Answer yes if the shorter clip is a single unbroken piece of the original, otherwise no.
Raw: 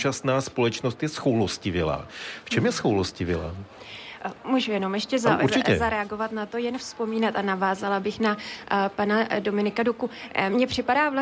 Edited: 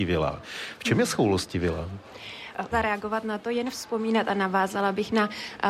no